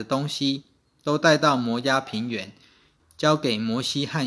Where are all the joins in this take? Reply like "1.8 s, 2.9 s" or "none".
3.0 s